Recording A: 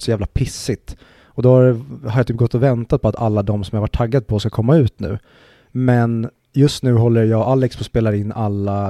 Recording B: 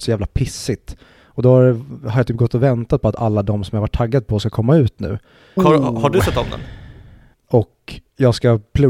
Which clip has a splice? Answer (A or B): B